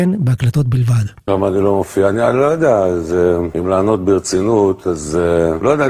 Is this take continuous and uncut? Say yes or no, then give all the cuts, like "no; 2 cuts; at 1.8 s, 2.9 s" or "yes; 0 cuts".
yes; 0 cuts